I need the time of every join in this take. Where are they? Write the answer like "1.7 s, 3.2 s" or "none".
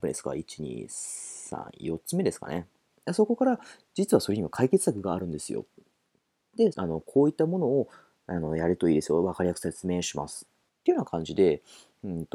2.9 s, 6.7 s, 10.7 s